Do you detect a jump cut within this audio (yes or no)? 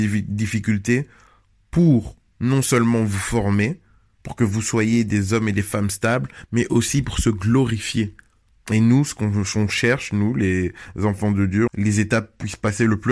yes